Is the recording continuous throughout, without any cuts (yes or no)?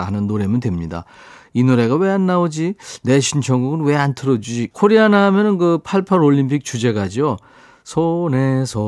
no